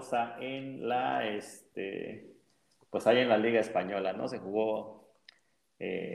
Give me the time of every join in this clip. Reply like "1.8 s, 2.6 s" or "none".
none